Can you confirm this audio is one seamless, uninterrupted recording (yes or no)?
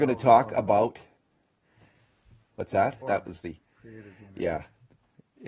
no